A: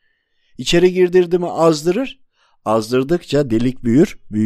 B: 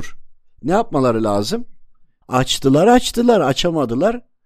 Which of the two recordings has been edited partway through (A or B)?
B